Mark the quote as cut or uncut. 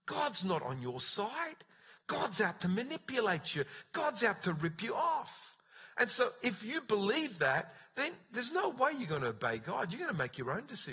uncut